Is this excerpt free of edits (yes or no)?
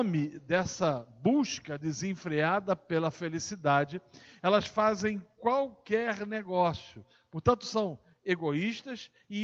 yes